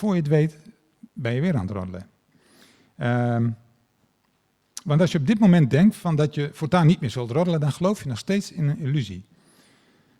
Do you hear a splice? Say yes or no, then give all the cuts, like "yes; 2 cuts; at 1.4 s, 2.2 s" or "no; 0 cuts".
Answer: no; 0 cuts